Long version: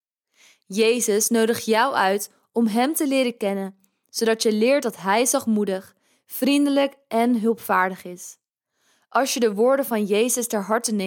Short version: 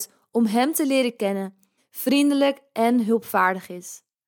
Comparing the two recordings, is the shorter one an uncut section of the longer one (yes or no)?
no